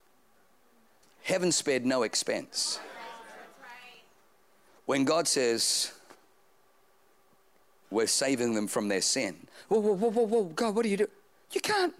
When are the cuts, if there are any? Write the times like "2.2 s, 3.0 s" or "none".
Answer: 1.0 s